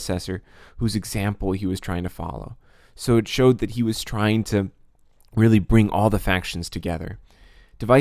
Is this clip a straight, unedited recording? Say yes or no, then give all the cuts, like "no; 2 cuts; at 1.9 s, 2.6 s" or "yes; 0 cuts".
yes; 0 cuts